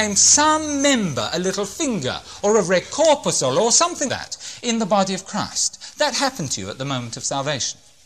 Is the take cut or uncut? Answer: cut